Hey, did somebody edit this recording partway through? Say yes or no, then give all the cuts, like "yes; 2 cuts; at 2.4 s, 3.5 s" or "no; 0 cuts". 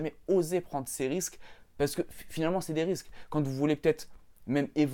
no; 0 cuts